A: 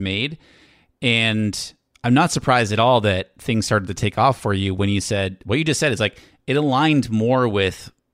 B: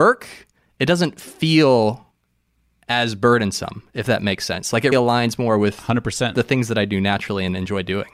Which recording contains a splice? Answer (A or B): B